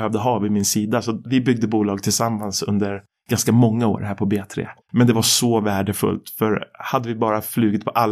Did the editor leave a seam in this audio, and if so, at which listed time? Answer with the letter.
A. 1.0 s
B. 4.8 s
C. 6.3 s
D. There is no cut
B